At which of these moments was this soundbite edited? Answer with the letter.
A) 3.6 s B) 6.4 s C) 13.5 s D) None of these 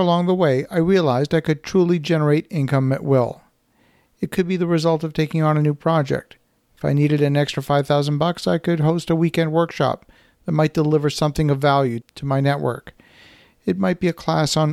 D